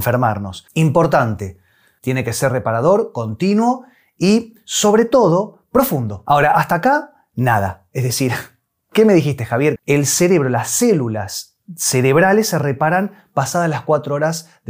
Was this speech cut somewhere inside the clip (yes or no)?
yes